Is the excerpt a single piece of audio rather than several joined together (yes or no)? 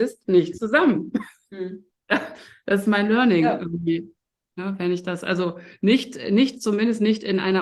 yes